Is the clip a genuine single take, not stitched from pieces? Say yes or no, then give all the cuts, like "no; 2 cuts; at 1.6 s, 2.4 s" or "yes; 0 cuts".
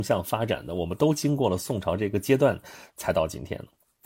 yes; 0 cuts